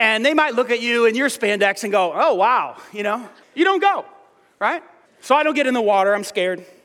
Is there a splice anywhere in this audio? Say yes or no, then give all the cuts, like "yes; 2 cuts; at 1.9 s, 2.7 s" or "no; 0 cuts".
yes; 2 cuts; at 3.4 s, 5.0 s